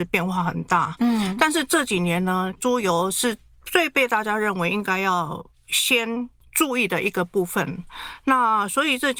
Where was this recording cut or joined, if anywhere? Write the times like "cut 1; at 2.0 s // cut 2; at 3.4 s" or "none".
cut 1; at 1.0 s // cut 2; at 2.6 s